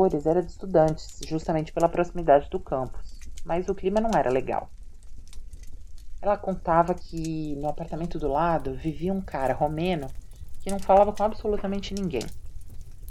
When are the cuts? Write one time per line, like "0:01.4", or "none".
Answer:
none